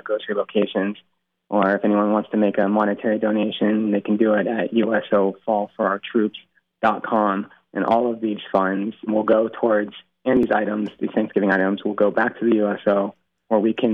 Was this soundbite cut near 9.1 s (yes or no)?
yes